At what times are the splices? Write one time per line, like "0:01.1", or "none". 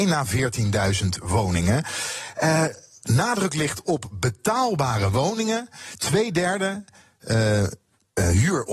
none